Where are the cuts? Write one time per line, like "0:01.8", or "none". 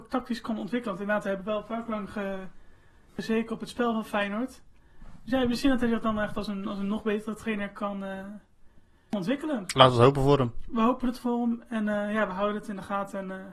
none